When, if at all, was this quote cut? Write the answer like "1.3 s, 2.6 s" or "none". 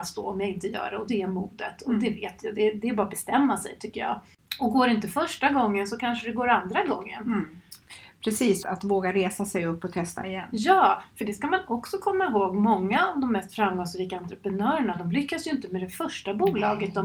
8.6 s